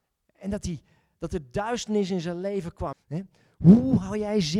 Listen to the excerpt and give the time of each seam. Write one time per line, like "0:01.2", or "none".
0:02.9